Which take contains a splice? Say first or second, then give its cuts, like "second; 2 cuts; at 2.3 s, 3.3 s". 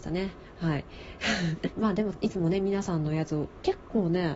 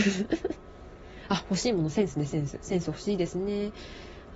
first; 1 cut; at 1.7 s